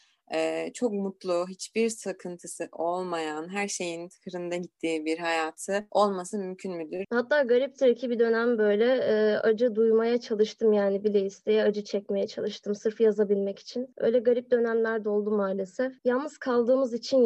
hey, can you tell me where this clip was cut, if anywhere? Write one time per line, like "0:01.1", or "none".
0:07.0
0:16.0